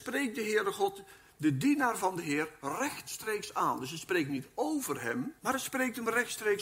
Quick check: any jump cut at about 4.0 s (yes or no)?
no